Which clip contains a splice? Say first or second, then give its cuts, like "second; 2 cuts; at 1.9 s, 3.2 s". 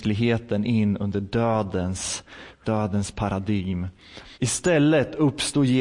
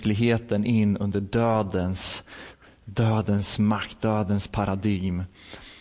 first; 2 cuts; at 2.6 s, 4.3 s